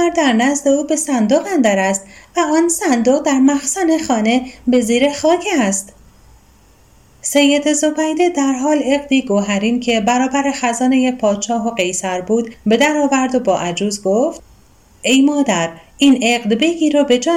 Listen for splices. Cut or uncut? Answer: uncut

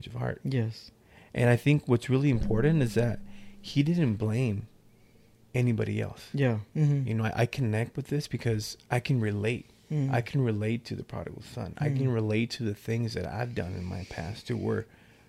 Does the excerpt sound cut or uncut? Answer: cut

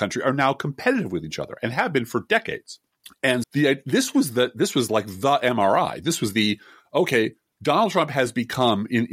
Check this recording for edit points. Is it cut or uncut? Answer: cut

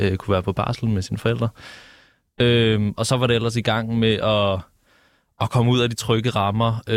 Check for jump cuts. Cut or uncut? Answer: uncut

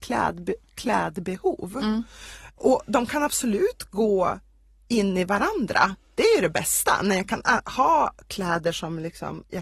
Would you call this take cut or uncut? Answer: uncut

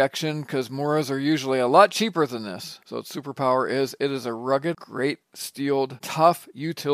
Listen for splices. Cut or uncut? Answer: cut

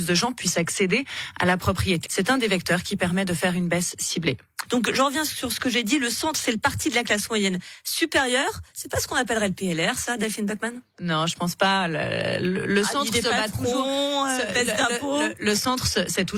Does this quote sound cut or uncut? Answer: cut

